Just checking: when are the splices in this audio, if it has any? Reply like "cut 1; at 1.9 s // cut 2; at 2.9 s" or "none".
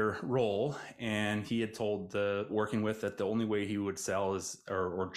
cut 1; at 2.5 s